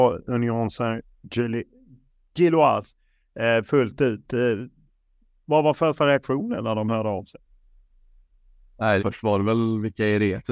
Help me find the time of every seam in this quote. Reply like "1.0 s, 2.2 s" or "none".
9.0 s